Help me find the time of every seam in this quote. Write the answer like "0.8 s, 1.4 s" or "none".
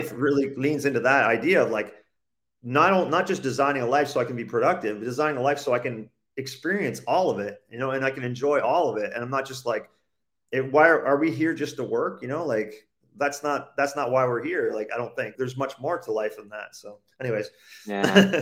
15.4 s